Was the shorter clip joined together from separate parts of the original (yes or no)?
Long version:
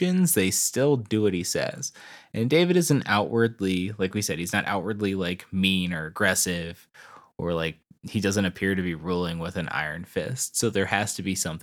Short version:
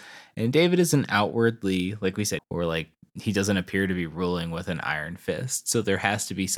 yes